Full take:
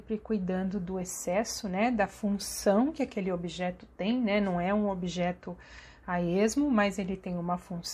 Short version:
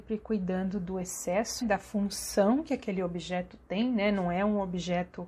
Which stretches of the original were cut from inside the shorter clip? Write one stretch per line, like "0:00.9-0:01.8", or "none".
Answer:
0:01.6-0:01.9